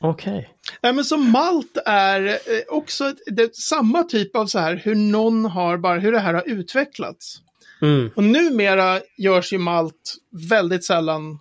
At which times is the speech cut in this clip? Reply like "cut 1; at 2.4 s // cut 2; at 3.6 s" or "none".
none

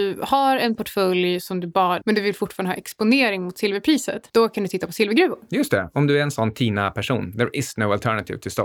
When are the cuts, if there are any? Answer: cut 1; at 2.0 s

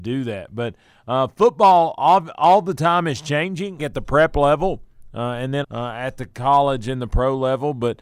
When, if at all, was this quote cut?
cut 1; at 3.8 s // cut 2; at 5.6 s

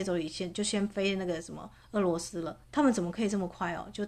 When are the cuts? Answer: cut 1; at 2.6 s

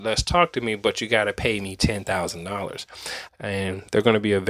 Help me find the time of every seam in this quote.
cut 1; at 3.3 s

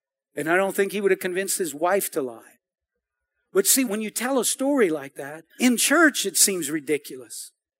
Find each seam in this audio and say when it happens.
cut 1; at 3.9 s // cut 2; at 5.5 s

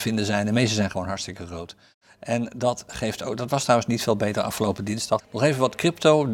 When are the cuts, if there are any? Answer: cut 1; at 5.2 s

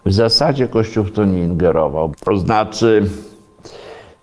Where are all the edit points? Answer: cut 1; at 2.1 s

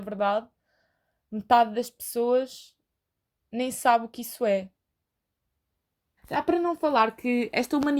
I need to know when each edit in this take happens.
cut 1; at 6.2 s

